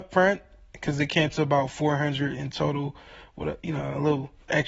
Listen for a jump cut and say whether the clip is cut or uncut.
uncut